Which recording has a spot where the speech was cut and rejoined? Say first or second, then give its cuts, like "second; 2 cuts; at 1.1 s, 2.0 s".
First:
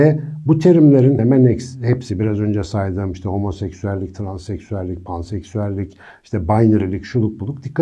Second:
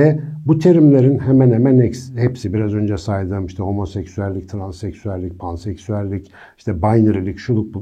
first; 1 cut; at 1.2 s